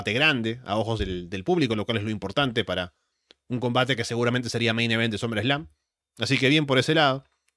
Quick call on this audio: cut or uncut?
uncut